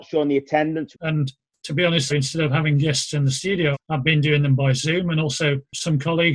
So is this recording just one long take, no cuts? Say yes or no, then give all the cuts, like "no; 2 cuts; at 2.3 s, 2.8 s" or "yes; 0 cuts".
no; 3 cuts; at 0.9 s, 2.1 s, 3.7 s